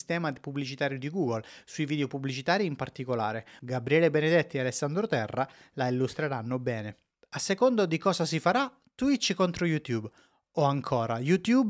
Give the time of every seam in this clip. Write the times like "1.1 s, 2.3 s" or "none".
3.6 s, 7.2 s